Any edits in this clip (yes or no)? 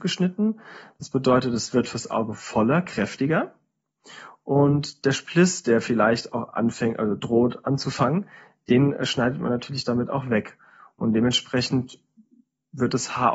no